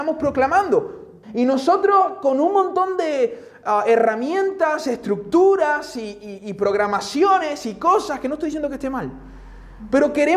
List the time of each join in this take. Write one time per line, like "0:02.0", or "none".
0:01.2